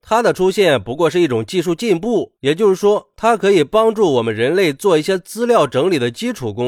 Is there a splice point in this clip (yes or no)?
yes